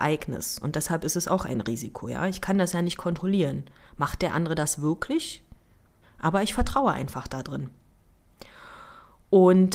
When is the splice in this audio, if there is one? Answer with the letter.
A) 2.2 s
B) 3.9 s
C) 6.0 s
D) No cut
C